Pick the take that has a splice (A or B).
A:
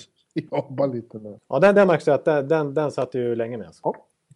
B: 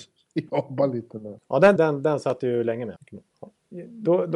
B